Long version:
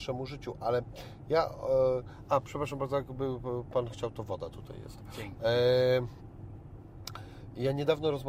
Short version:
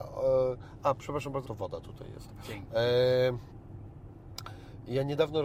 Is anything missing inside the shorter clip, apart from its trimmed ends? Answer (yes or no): yes